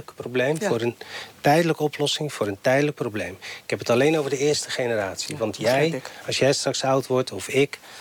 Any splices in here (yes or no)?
no